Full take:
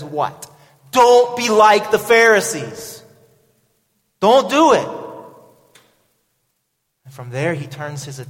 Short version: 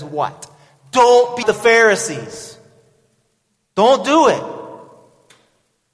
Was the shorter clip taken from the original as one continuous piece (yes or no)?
no